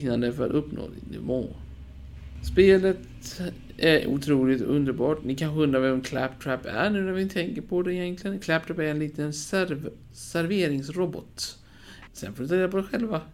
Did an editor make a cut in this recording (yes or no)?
yes